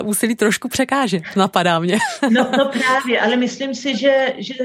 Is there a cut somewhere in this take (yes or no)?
no